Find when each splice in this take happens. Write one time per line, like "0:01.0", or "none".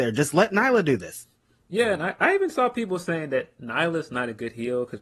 none